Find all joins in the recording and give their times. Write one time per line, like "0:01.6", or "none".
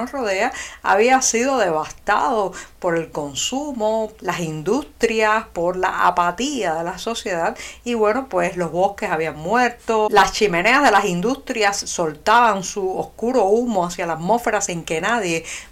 0:04.1